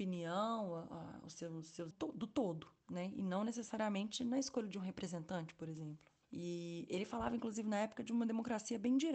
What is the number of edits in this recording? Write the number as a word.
two